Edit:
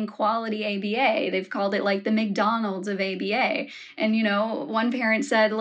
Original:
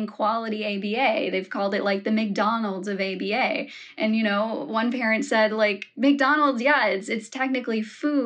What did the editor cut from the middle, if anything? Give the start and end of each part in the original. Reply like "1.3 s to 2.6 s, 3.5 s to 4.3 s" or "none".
none